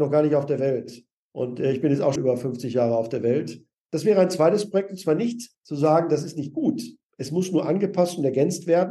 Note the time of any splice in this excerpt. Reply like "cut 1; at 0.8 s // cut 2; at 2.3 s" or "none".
cut 1; at 2.2 s